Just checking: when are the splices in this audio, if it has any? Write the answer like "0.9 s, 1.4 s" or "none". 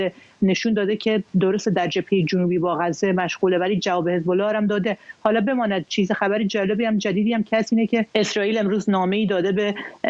8.1 s